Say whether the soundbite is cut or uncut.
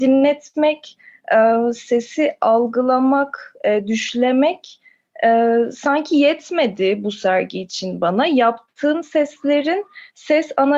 uncut